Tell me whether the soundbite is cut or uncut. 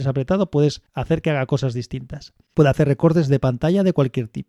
cut